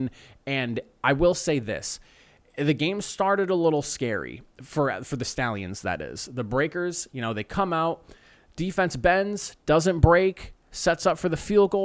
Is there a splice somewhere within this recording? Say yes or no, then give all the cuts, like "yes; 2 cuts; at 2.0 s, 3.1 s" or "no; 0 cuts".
no; 0 cuts